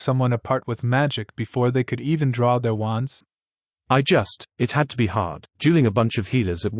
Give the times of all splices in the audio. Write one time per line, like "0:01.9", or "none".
none